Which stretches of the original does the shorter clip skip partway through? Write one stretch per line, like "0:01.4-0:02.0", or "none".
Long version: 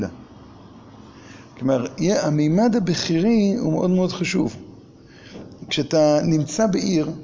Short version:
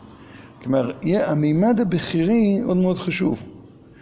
0:03.6-0:03.8